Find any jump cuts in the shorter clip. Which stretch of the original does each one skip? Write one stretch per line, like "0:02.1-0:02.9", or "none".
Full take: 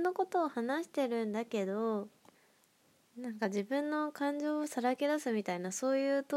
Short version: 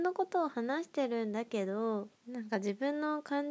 0:02.2-0:03.1